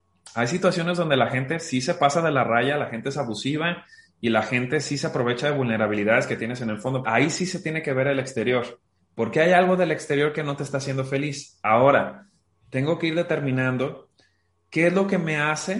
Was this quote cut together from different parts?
yes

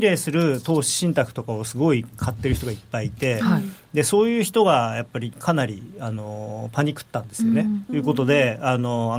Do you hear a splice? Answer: yes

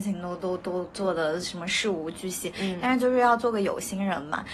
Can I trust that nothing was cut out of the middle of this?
yes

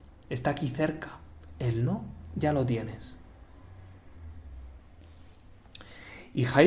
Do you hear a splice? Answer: no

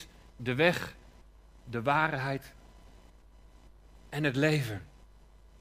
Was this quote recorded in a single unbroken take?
yes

